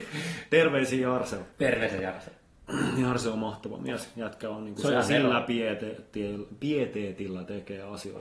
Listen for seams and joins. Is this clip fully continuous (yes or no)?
yes